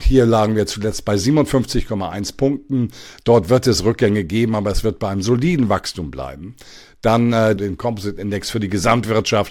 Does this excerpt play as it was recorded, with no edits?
no; 1 cut; at 7.6 s

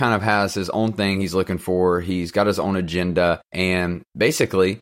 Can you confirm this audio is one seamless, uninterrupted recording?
no; 1 cut; at 3.5 s

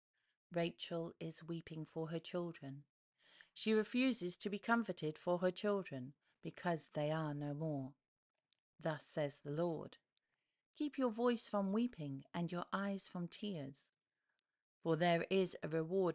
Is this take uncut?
yes; 0 cuts

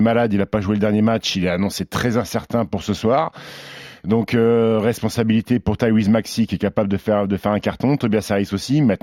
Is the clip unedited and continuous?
yes; 0 cuts

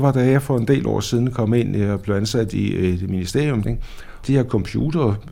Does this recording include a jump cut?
yes; 1 cut; at 3.6 s

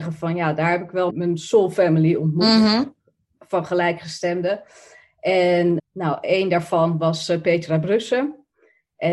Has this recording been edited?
yes; 2 cuts; at 1.1 s, 5.8 s

